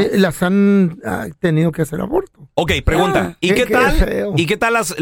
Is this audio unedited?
yes; 0 cuts

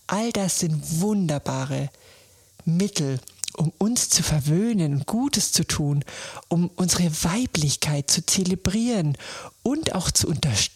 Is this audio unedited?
yes; 0 cuts

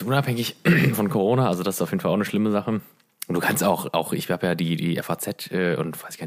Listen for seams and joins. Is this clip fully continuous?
yes; 0 cuts

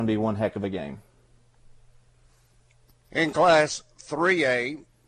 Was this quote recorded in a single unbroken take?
yes; 0 cuts

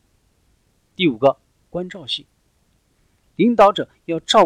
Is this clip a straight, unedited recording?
yes; 0 cuts

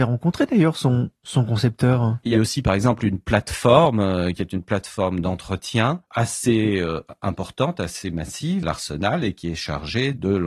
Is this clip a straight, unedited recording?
no; 2 cuts; at 2.3 s, 8.6 s

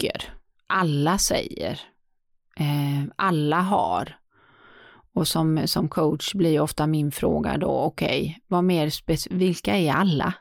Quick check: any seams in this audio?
no; 0 cuts

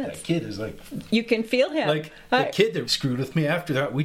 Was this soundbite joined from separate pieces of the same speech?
yes; 1 cut; at 2.8 s

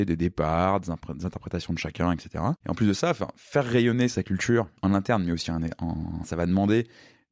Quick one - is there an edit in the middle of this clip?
yes; 2 cuts; at 2.6 s, 6.2 s

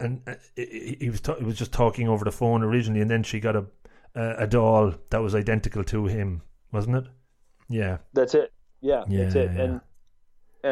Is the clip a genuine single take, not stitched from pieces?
yes; 0 cuts

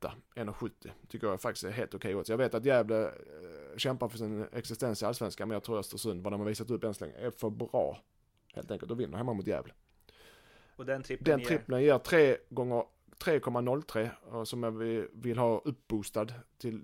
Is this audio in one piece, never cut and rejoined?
yes; 0 cuts

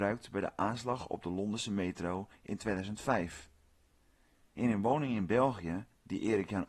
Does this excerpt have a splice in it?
yes; 1 cut; at 4.5 s

